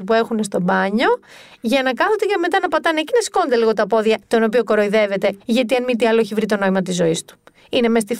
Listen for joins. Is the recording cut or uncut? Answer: cut